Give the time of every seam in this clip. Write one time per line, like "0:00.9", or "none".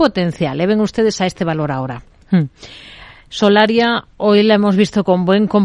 0:02.2